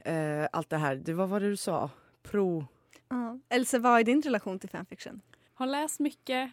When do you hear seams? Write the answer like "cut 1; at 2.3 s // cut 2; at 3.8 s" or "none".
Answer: cut 1; at 3.0 s // cut 2; at 5.5 s